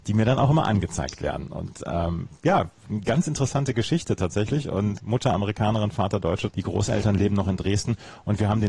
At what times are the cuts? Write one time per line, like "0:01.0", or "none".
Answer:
0:05.0
0:06.5